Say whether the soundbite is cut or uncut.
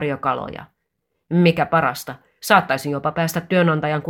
uncut